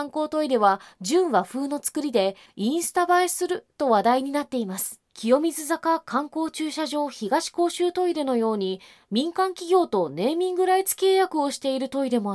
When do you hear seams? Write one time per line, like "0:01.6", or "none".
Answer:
0:05.1